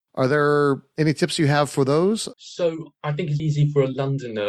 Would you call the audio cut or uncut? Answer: cut